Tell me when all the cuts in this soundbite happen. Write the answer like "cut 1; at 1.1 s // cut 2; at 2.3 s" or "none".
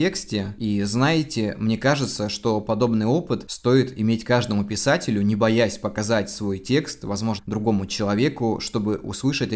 cut 1; at 7.4 s